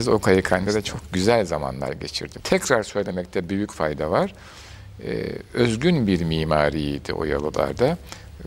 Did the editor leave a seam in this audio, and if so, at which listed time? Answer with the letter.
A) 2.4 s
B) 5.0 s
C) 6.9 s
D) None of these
A